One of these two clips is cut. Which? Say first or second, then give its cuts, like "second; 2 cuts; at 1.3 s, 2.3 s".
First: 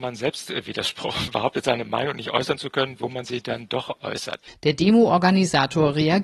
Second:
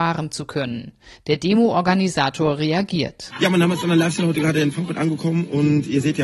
first; 3 cuts; at 1.3 s, 3.0 s, 4.5 s